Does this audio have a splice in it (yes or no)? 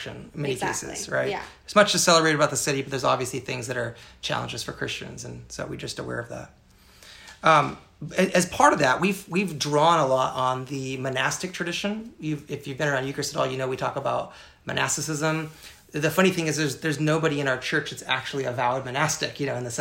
no